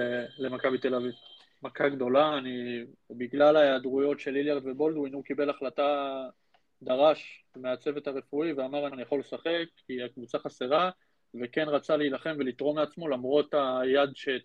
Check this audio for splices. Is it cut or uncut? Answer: cut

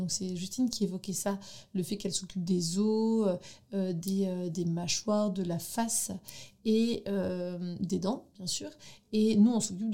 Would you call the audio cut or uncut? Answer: uncut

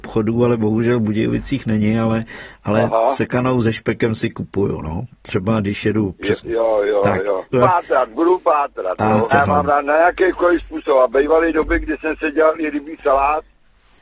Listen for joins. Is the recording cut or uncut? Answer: cut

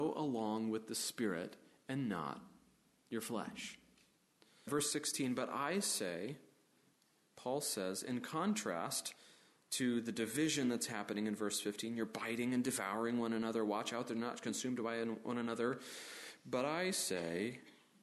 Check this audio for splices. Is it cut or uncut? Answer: cut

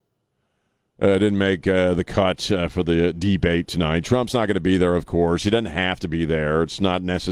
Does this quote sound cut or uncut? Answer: uncut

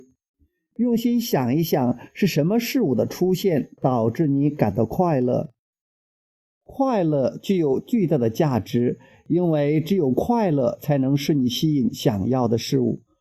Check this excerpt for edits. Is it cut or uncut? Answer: cut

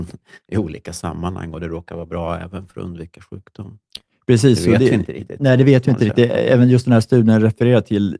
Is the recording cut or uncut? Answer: uncut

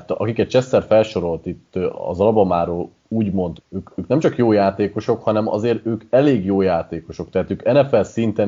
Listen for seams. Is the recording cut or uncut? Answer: cut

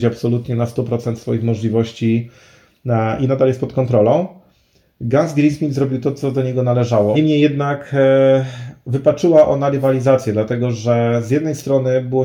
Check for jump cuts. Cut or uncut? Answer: cut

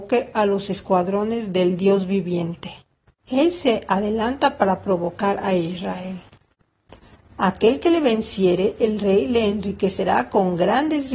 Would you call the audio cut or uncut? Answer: cut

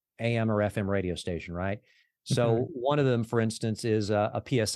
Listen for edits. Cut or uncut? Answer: uncut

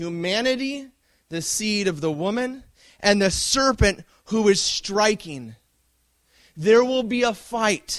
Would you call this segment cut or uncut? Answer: uncut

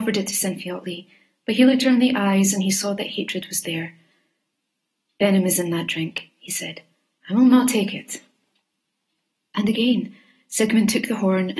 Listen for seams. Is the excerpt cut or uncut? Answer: uncut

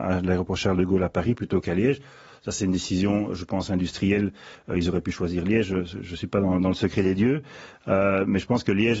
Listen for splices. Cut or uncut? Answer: uncut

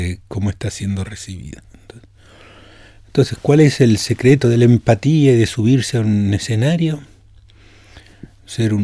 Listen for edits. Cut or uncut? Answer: uncut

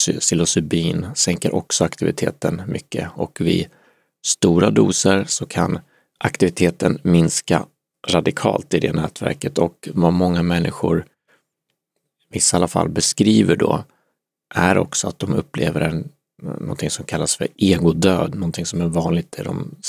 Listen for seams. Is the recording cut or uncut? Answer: uncut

